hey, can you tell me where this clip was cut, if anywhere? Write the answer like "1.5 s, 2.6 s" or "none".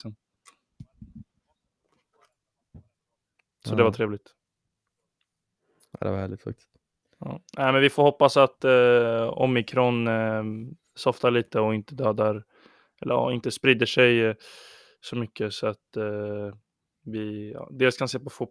none